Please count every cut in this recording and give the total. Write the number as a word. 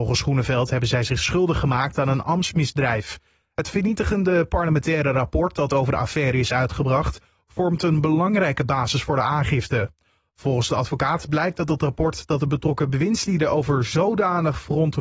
zero